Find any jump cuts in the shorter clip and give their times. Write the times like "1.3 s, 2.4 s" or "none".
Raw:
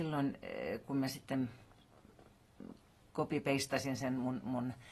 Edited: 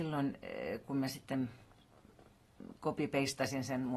2.8 s